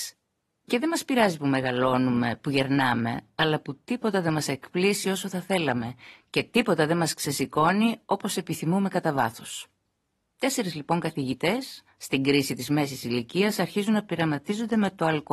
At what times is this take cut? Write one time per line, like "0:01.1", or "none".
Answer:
none